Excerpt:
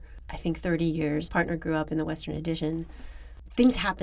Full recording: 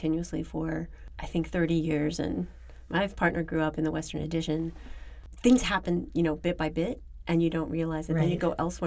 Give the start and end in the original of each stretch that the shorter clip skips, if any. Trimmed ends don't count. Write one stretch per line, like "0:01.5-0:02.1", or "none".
0:02.2-0:03.1

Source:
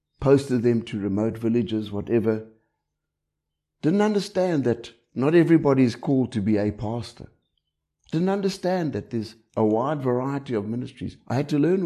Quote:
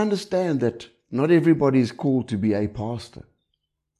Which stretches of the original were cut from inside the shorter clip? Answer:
none

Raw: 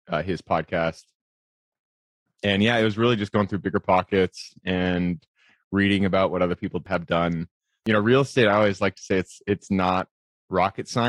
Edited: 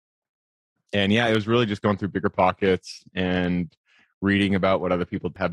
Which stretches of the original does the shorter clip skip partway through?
none

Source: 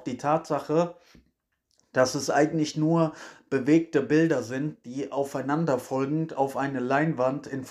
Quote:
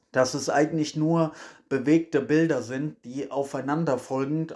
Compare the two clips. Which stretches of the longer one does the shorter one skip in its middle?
none

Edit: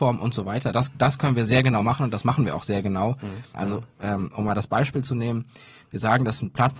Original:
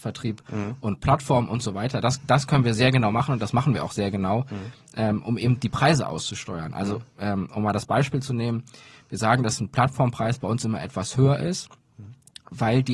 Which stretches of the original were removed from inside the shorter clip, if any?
0:04.8-0:06.7

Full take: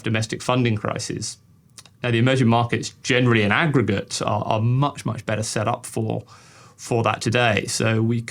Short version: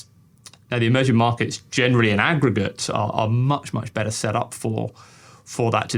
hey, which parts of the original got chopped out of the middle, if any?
none

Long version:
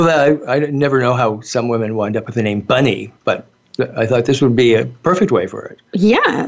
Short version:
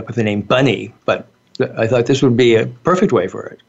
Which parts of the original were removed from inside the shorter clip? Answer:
none

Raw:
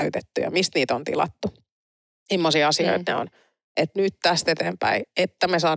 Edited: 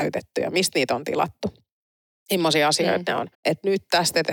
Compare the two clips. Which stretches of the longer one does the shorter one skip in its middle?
0:03.3-0:03.7

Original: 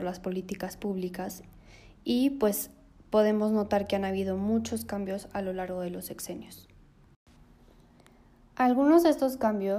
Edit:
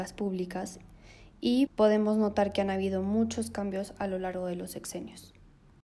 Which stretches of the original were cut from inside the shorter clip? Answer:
0:02.3-0:03.0

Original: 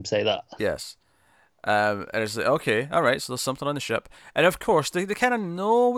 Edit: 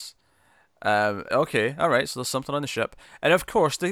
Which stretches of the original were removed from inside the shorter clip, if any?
0:02.1-0:02.4

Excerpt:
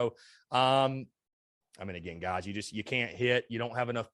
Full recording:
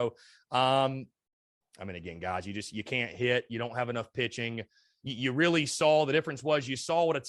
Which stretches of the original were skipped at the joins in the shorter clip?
none

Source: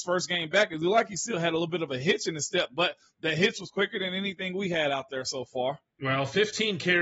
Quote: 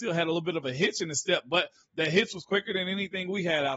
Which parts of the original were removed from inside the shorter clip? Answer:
none

